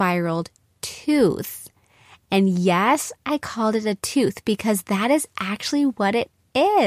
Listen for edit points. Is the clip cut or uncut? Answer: uncut